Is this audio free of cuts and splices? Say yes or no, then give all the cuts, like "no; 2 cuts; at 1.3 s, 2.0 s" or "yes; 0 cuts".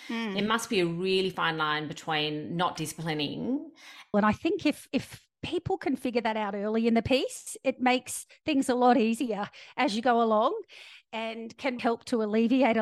no; 2 cuts; at 4.1 s, 11.8 s